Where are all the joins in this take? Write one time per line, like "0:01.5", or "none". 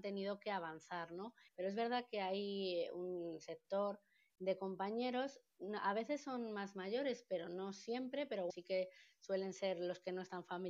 0:01.5
0:08.5

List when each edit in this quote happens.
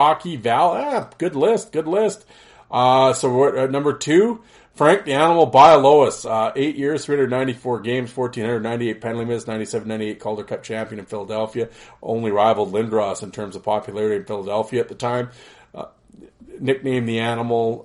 none

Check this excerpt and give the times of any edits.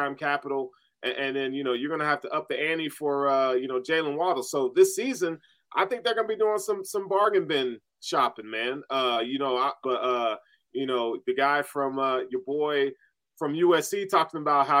0:09.8

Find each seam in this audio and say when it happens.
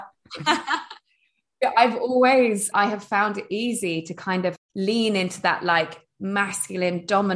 0:02.7
0:04.6

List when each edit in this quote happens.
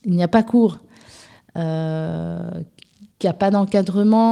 0:03.1

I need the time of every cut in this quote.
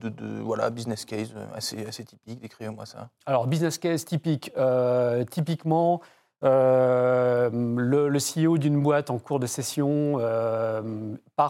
none

